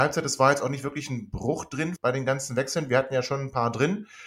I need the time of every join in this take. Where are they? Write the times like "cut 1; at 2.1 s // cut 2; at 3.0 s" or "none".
cut 1; at 2.0 s